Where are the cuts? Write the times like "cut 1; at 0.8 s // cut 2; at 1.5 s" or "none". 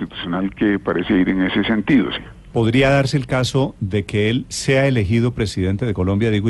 cut 1; at 2.5 s